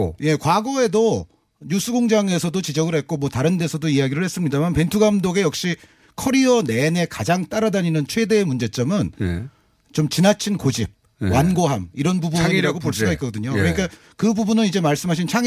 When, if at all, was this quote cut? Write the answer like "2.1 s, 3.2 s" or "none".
none